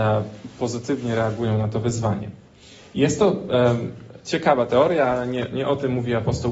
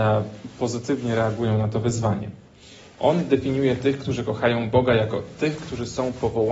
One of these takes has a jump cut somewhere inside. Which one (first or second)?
second